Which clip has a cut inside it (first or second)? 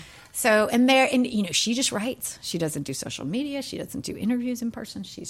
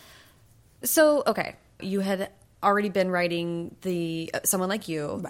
second